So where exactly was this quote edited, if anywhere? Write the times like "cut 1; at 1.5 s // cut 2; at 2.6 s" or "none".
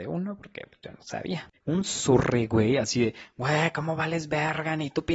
cut 1; at 1.5 s